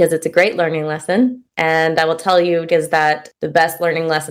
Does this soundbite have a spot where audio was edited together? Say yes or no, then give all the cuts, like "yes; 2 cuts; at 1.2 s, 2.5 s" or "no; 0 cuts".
yes; 1 cut; at 2.7 s